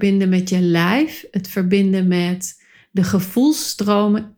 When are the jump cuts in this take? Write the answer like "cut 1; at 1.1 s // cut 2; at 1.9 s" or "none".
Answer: none